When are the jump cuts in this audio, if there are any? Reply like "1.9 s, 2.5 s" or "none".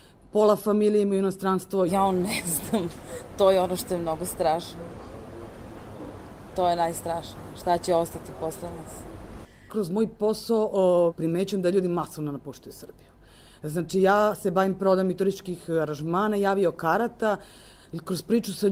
1.9 s, 9.7 s, 11.1 s